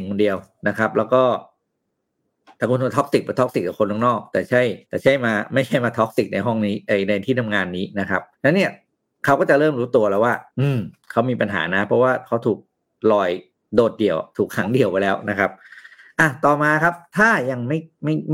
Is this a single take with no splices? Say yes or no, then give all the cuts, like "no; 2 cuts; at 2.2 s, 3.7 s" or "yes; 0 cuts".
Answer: no; 3 cuts; at 4.8 s, 8.3 s, 10.5 s